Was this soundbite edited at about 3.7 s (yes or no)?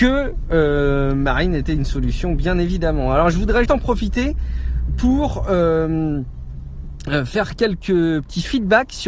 yes